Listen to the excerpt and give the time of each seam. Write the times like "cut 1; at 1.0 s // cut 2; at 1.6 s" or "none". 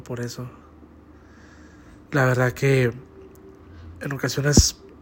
cut 1; at 2.1 s